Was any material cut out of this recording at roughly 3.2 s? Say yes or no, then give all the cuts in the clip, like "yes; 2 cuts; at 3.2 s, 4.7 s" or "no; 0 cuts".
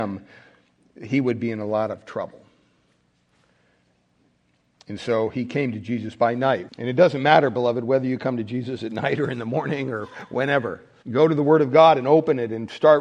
no; 2 cuts; at 6.7 s, 11.0 s